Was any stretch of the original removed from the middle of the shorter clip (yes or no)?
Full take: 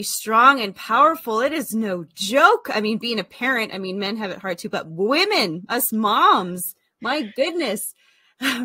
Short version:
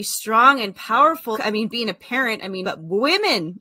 yes